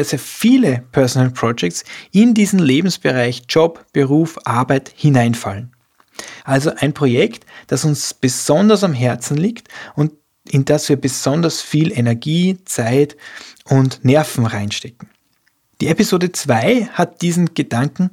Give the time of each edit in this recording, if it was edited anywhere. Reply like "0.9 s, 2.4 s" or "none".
6.4 s